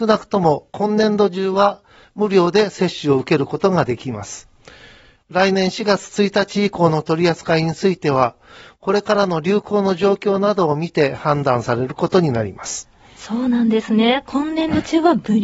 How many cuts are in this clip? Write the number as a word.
zero